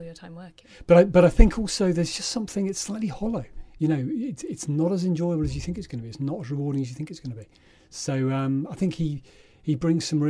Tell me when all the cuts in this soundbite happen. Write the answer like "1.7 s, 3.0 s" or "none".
none